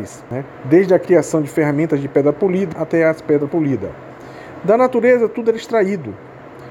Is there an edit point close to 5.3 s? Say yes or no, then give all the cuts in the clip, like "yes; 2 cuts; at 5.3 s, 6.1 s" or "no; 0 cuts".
no; 1 cut; at 2.7 s